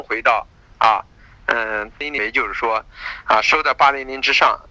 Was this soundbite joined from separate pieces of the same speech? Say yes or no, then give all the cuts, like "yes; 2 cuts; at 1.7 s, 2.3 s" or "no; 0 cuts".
yes; 1 cut; at 1.9 s